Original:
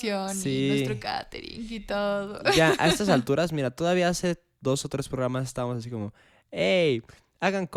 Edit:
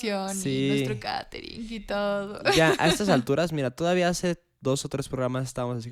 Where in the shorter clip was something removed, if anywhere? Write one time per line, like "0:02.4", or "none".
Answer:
none

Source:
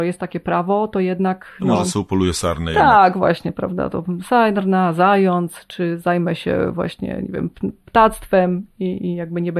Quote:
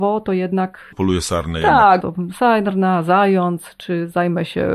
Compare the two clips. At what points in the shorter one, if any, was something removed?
0:00.9
0:02.0

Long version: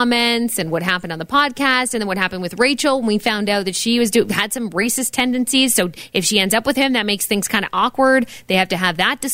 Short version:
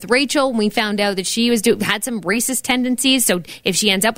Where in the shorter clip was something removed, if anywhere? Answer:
none

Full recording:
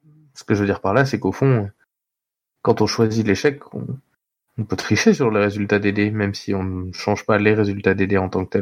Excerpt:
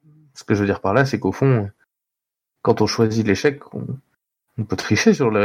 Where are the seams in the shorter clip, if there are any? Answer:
none

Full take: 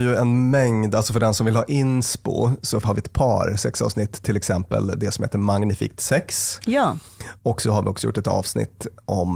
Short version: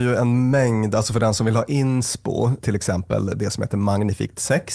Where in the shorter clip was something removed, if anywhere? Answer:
0:02.6

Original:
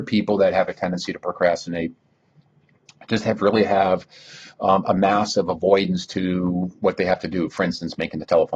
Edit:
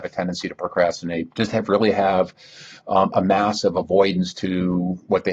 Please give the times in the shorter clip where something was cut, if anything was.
0:01.3

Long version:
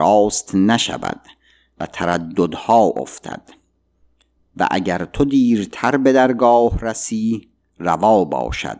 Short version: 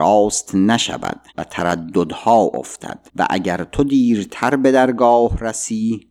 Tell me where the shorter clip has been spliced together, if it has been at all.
0:01.3
0:03.1

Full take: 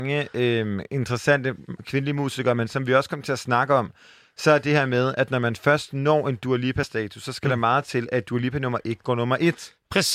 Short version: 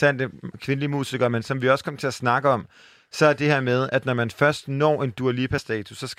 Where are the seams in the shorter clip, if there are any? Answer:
none

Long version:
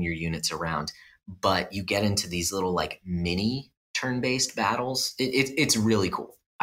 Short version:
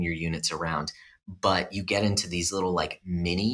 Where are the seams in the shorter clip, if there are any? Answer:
none

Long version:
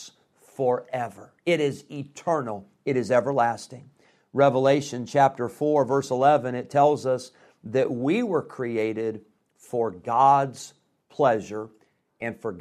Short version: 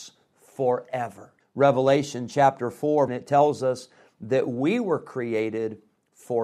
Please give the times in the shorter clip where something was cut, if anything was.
0:01.4
0:03.1

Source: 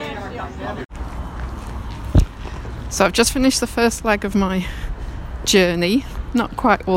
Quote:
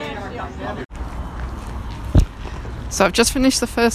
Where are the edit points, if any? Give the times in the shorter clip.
none

